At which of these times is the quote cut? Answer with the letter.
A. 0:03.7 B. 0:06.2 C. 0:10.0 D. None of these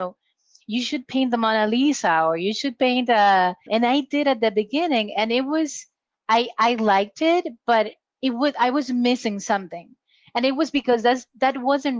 A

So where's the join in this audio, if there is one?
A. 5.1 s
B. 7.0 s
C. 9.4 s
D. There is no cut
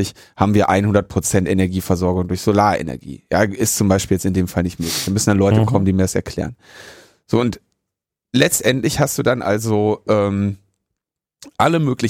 D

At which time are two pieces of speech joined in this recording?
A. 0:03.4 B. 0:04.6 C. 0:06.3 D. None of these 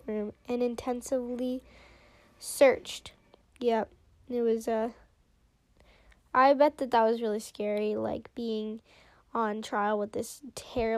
A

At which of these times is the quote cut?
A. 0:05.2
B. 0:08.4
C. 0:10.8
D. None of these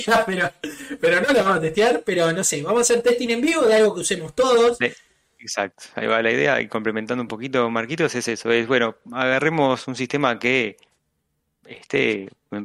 D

